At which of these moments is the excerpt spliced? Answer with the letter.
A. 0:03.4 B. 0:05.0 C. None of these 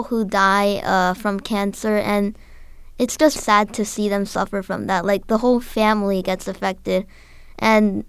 A